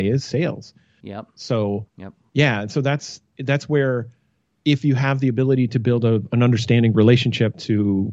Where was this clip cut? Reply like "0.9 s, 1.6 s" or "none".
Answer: 1.0 s